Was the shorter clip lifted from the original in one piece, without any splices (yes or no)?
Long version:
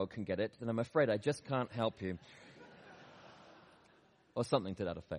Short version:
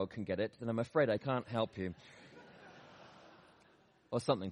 no